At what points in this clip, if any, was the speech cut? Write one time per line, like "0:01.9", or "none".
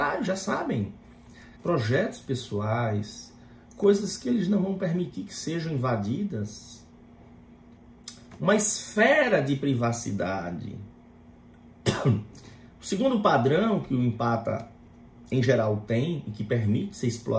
0:01.6
0:03.7